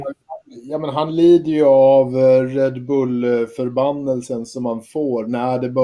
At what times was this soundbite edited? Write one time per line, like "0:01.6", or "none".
none

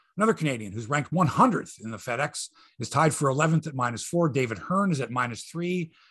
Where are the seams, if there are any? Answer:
none

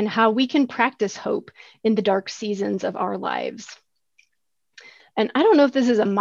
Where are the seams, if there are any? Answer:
0:05.0

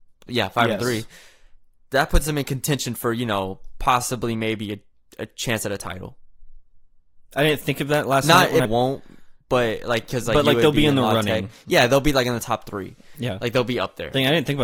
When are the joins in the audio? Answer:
0:08.6

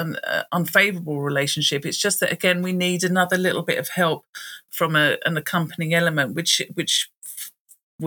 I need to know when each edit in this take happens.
0:04.7

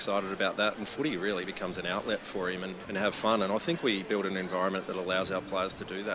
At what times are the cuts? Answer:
0:02.8

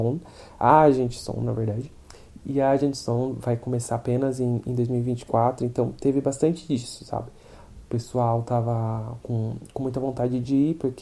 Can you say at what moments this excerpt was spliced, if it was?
none

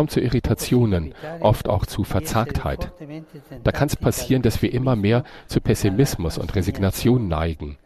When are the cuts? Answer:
none

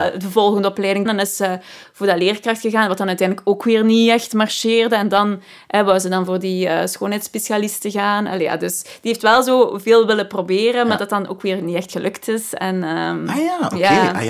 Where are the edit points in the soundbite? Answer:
0:01.1

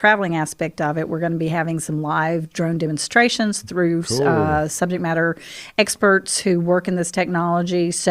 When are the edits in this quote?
none

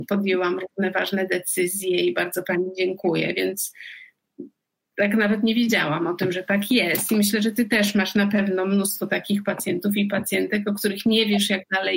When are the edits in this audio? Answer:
none

